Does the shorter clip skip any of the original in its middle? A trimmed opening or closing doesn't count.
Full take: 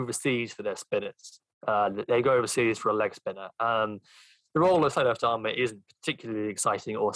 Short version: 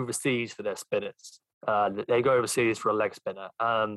no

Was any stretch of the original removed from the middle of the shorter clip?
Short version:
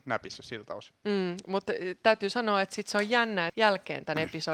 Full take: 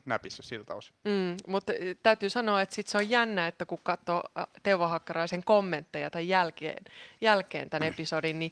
yes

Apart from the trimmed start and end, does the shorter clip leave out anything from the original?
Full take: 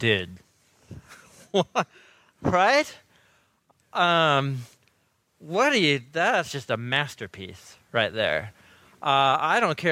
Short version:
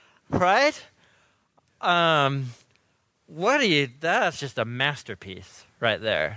no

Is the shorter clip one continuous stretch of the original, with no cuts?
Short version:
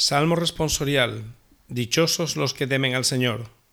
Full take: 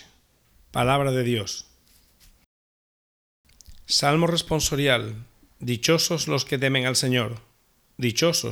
yes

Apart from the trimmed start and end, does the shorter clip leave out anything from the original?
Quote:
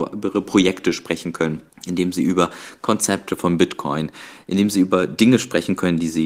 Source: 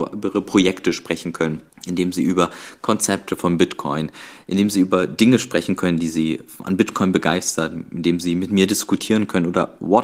no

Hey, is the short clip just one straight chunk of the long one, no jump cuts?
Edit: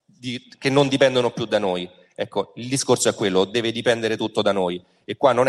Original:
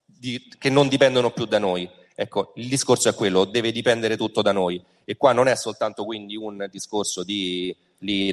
yes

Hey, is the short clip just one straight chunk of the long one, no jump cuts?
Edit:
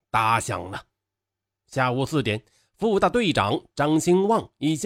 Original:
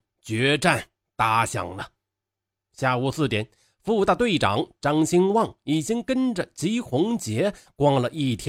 yes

